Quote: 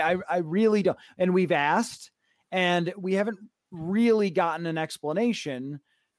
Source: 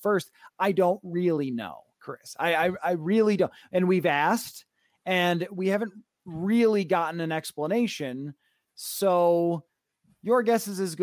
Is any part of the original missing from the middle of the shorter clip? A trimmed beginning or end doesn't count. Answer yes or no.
no